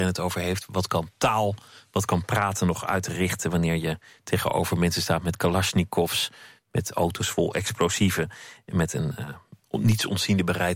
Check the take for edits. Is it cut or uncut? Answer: uncut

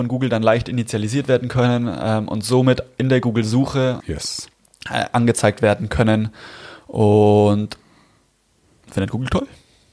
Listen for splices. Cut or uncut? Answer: cut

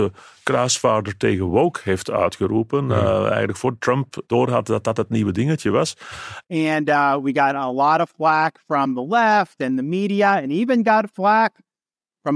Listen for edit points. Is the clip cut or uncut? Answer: cut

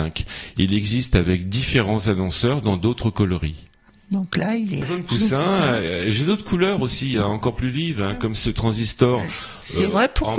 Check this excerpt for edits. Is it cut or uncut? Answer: uncut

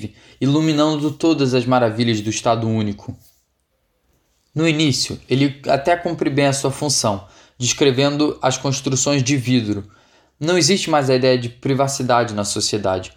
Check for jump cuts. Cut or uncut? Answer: uncut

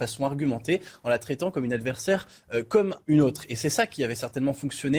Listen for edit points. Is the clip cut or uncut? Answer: cut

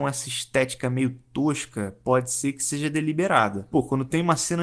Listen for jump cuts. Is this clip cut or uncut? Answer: cut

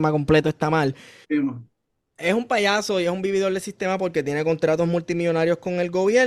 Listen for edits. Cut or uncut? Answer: cut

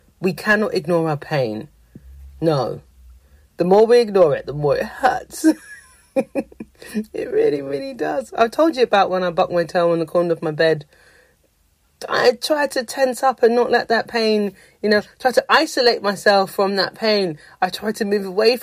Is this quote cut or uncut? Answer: uncut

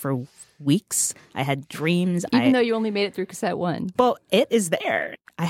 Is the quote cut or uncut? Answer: uncut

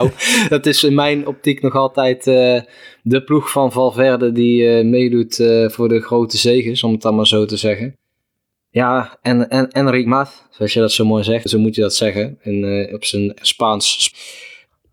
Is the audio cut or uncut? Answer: cut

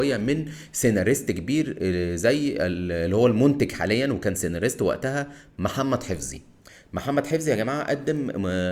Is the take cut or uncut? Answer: uncut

